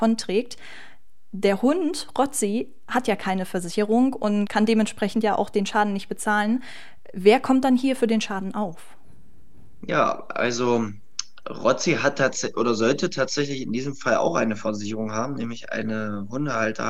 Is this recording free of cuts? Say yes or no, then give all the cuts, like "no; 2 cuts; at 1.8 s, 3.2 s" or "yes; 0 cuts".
yes; 0 cuts